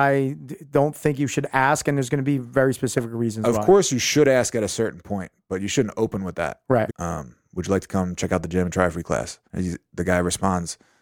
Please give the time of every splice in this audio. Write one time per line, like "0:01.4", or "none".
0:06.9
0:09.4